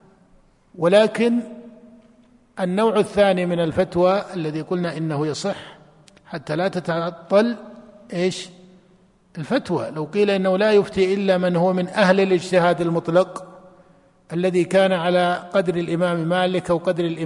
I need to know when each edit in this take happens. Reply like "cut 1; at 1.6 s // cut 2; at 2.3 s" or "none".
none